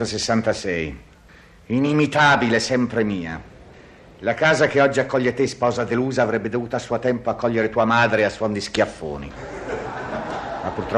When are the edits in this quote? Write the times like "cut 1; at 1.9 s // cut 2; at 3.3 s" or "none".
none